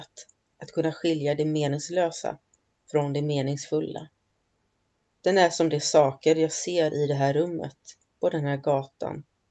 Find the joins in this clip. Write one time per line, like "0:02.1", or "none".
0:05.1